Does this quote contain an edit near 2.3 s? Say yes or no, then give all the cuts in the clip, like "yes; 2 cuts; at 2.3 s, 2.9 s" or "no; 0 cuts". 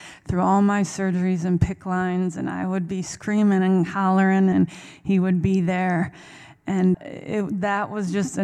no; 2 cuts; at 4.5 s, 6.9 s